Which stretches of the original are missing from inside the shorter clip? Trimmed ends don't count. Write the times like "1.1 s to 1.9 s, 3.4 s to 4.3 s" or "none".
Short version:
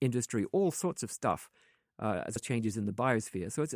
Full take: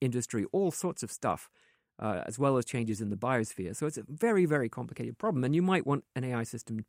2.4 s to 2.6 s